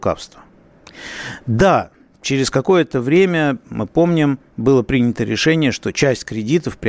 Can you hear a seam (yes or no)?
no